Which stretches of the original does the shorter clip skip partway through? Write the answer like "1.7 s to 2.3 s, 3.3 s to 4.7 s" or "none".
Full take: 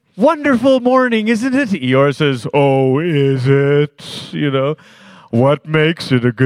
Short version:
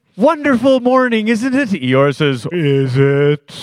2.5 s to 3.0 s